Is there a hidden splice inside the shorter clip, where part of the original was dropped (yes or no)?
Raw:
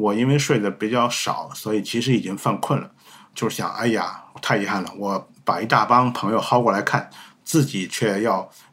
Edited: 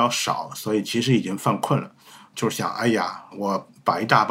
yes